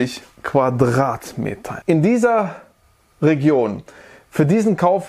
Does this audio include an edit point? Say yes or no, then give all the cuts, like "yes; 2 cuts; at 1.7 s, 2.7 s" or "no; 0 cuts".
yes; 1 cut; at 1.8 s